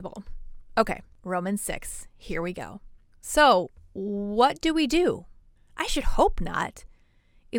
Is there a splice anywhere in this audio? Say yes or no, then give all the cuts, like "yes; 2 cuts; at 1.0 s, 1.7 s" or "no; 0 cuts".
yes; 1 cut; at 5.6 s